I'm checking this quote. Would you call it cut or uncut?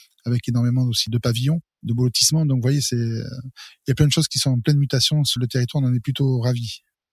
cut